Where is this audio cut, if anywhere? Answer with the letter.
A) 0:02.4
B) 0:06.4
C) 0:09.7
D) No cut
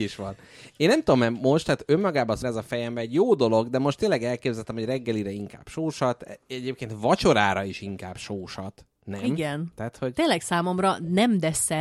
A